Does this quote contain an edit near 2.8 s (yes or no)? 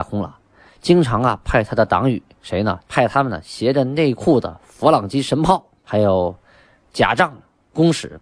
yes